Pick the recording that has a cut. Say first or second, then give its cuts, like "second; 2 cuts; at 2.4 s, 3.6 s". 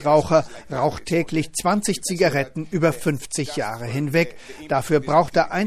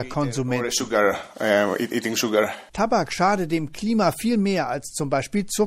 second; 1 cut; at 2.7 s